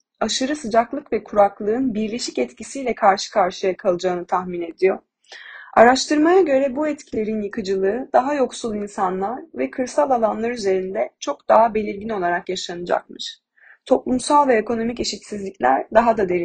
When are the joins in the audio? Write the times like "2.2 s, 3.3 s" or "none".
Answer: none